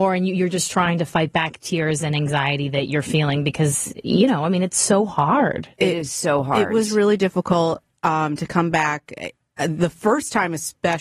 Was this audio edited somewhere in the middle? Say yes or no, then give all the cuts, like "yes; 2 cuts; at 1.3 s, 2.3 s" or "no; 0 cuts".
no; 0 cuts